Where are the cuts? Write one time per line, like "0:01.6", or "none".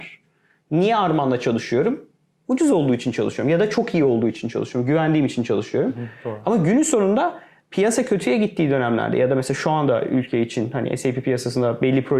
none